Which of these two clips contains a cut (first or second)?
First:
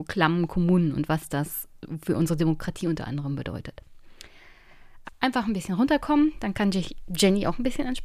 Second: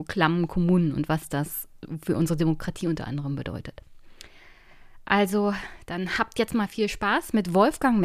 first